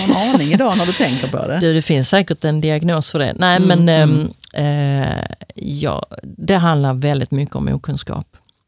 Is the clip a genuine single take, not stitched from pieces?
yes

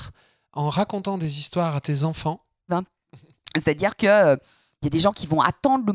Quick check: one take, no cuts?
no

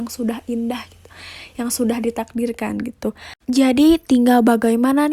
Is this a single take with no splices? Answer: no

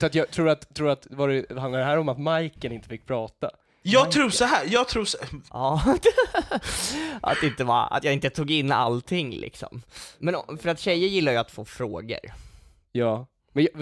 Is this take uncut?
no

